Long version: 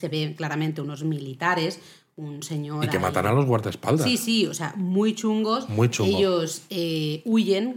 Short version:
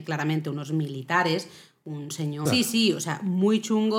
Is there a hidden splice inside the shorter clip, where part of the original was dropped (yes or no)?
yes